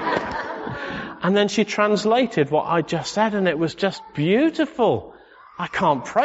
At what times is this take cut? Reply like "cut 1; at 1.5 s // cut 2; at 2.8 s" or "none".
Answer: none